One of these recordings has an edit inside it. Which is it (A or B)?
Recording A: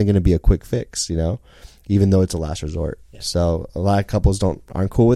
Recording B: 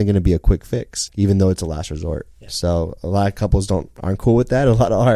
B